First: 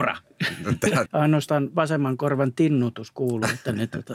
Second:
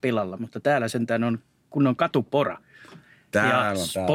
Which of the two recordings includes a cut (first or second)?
first